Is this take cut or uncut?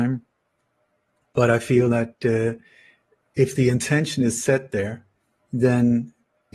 uncut